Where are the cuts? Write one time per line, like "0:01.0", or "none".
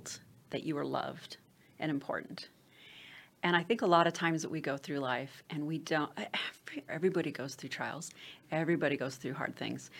0:06.9

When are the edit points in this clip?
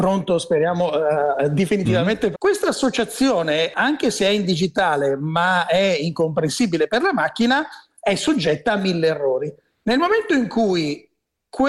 0:02.3

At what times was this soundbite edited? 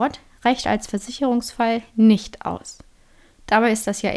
none

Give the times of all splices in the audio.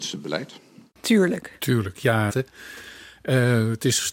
0:02.3

